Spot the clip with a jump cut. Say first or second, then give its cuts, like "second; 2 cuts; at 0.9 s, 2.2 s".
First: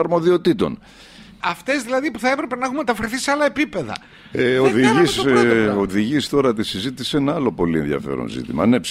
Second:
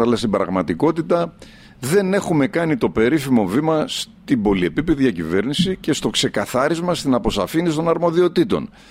first; 1 cut; at 1.4 s